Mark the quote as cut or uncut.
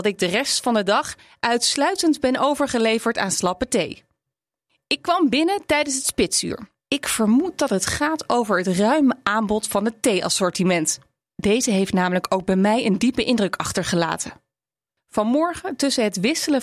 cut